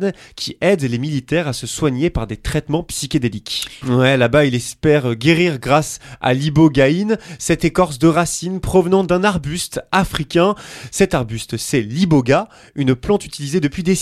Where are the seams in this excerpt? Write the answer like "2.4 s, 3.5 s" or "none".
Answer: 3.8 s